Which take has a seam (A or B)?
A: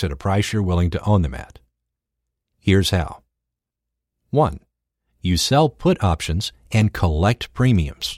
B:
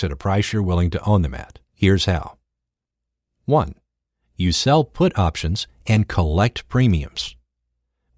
B